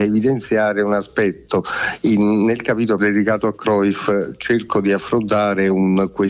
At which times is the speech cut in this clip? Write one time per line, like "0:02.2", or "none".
0:03.0